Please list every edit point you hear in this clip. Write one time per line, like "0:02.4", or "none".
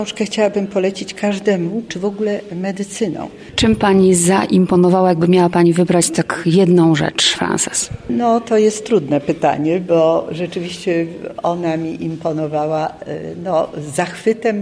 0:01.9